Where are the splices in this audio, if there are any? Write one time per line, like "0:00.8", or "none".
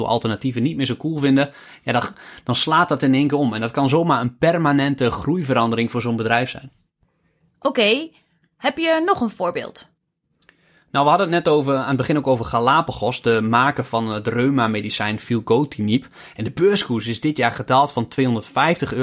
none